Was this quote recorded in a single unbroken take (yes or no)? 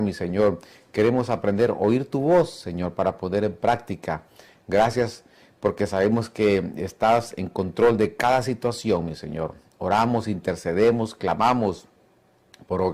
yes